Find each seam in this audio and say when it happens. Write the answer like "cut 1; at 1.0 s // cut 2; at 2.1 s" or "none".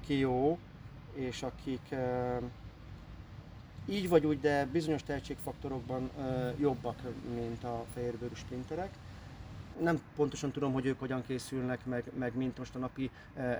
cut 1; at 9.7 s